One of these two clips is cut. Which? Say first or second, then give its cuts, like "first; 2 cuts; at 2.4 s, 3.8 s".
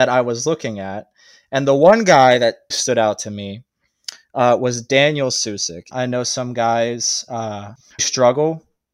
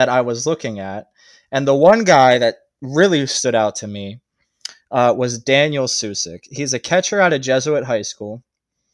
first; 3 cuts; at 2.7 s, 5.9 s, 8.0 s